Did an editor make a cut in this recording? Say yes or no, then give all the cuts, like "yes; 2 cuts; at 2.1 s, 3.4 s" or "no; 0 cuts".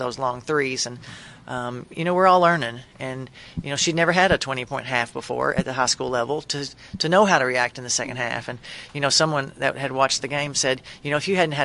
no; 0 cuts